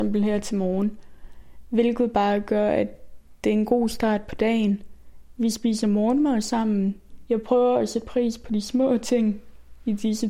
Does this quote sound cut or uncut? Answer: cut